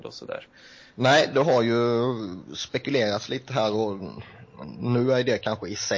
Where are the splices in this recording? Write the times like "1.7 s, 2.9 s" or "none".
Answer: 0.9 s